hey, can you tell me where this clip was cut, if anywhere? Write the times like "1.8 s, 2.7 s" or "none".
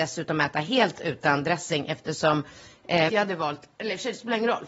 3.1 s